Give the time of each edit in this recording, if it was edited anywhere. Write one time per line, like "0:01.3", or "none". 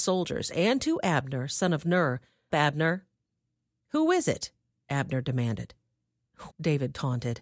0:02.5
0:06.5